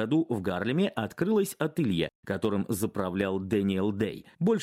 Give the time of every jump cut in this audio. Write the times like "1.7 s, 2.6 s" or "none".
none

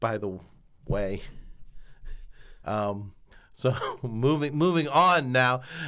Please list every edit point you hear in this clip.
2.6 s

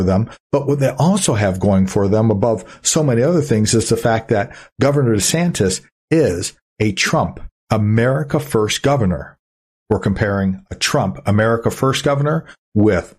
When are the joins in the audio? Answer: 7.6 s, 9.7 s

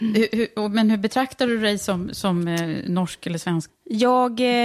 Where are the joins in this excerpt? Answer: 3.7 s

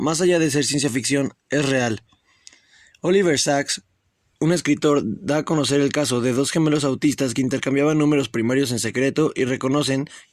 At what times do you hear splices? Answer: none

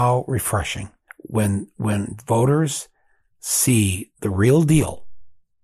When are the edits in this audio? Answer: 1.1 s

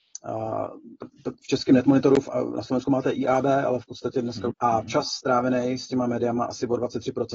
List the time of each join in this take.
4.5 s

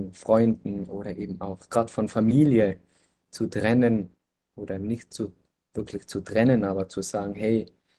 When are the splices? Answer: none

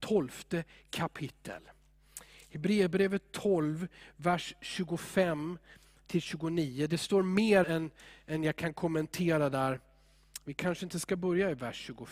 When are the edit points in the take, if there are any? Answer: 7.6 s

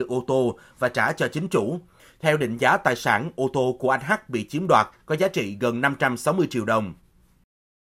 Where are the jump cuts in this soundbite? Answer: none

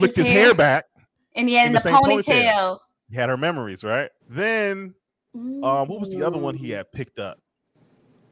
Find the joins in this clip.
4.2 s

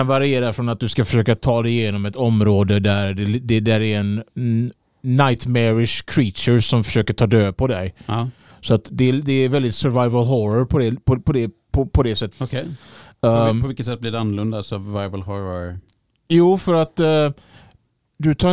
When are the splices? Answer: 12.3 s

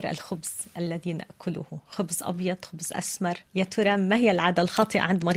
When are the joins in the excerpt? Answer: 3.5 s

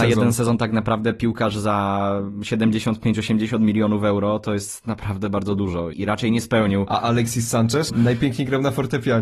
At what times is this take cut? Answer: 5.9 s, 7.9 s

